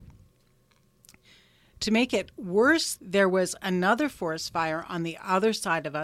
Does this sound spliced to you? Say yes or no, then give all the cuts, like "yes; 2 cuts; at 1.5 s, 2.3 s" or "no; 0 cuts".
yes; 1 cut; at 3.0 s